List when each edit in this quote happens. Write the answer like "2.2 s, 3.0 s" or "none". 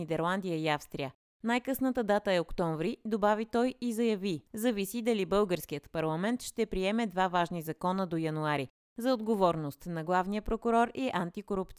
4.5 s